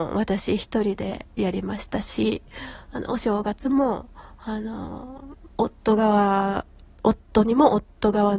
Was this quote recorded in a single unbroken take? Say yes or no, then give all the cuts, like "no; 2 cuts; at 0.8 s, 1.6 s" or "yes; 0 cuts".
no; 1 cut; at 5.5 s